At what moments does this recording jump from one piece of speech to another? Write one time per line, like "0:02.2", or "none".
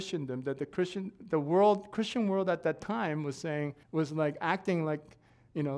0:03.8

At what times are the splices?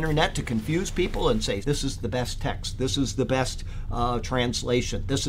0:01.6
0:03.9

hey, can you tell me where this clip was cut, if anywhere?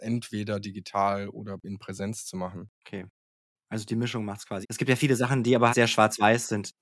0:04.6
0:05.7

